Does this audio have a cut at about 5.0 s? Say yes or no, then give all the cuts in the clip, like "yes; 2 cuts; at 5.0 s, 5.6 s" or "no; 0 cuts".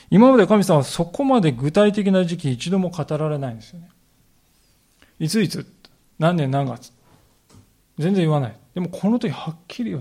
no; 0 cuts